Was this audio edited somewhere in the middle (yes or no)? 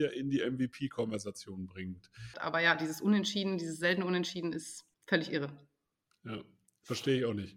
yes